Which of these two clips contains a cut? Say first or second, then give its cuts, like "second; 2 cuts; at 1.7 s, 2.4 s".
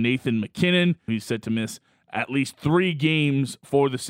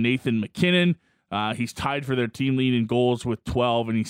first; 1 cut; at 1.1 s